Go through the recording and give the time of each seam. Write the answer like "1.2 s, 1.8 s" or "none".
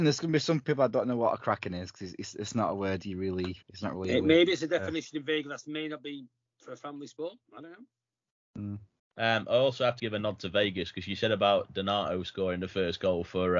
3.6 s, 9.0 s, 10.0 s